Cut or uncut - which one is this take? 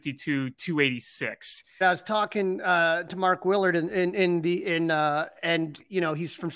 cut